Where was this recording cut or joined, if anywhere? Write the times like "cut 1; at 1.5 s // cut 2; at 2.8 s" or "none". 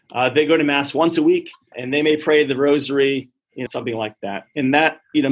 cut 1; at 1.7 s // cut 2; at 3.7 s